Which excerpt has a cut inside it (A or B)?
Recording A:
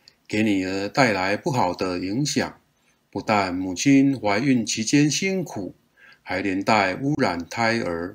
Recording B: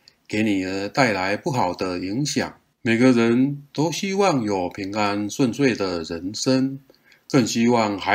B